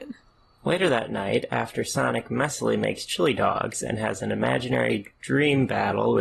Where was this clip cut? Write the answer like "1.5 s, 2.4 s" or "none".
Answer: none

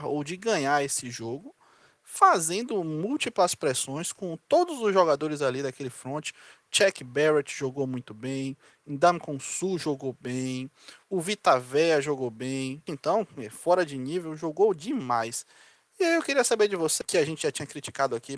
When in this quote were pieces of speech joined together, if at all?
12.9 s, 17.0 s

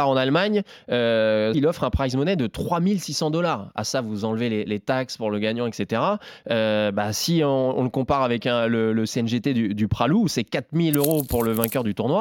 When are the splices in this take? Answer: 1.5 s

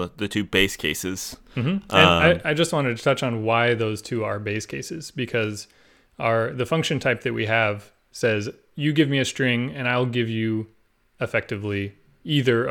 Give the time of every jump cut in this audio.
none

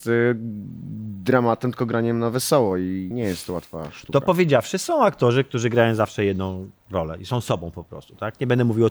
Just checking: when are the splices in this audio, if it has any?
3.1 s

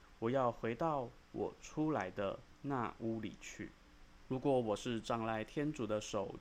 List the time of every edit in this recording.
4.3 s

